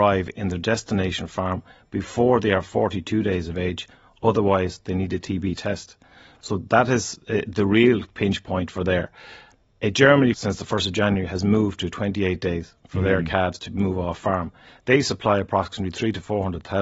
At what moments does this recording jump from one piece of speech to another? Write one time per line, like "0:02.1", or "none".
0:10.3

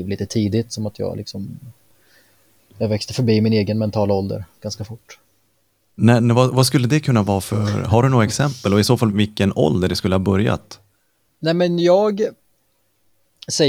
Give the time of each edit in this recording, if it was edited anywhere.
0:09.1

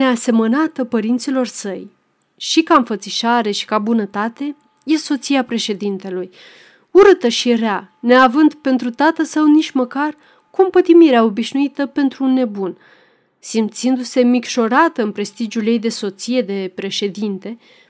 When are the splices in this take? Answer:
none

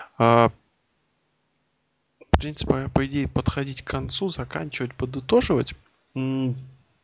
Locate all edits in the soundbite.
0:02.7

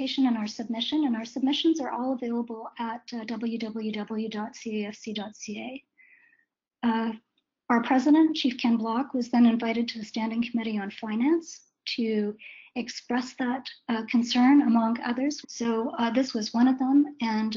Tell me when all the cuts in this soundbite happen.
0:15.4

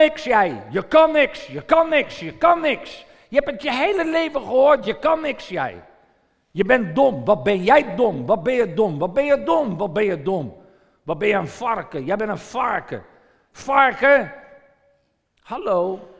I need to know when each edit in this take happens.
none

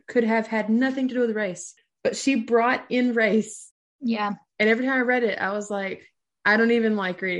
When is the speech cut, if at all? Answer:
none

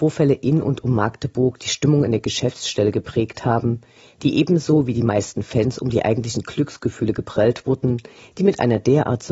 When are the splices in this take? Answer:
none

